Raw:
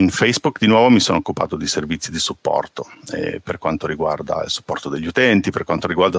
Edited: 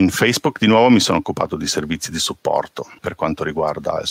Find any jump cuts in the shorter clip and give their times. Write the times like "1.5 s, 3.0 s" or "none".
3.0 s